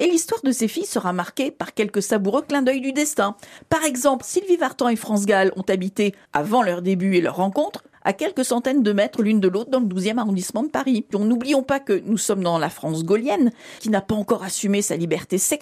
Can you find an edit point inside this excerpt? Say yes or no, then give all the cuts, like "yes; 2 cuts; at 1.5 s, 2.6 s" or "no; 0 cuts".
yes; 2 cuts; at 4.2 s, 11.1 s